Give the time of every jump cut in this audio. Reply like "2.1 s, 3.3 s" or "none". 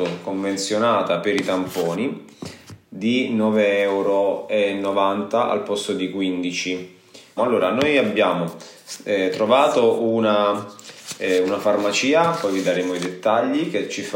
7.4 s

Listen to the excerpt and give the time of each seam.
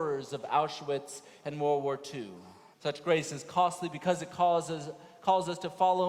2.7 s

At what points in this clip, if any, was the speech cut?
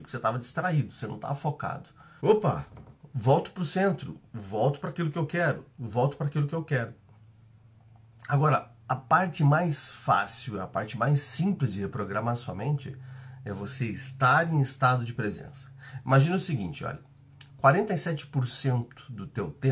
2.2 s

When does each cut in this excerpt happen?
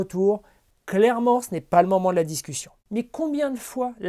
2.8 s

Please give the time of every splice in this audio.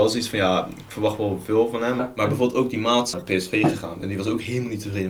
2.0 s, 3.1 s

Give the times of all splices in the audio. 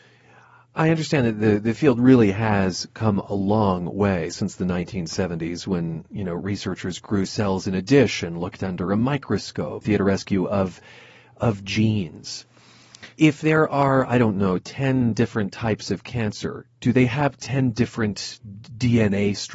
9.8 s, 13.1 s

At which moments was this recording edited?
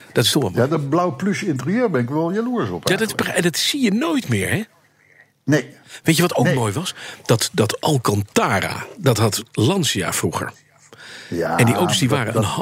none

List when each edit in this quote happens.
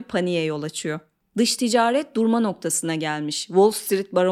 none

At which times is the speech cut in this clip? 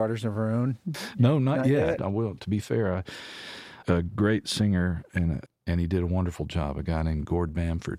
2.0 s, 3.8 s, 5.5 s

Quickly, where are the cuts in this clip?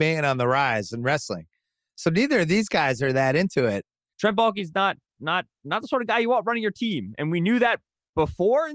4.1 s

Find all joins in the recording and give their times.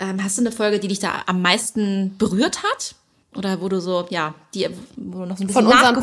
none

